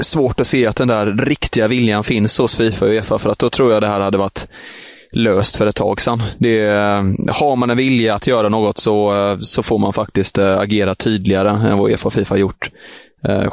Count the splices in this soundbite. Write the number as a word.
zero